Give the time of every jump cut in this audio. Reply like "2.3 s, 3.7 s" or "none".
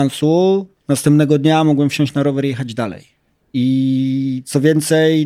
none